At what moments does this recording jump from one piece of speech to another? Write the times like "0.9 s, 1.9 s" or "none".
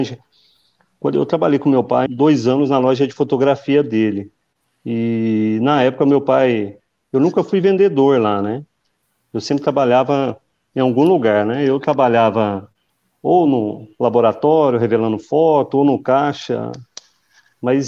2.1 s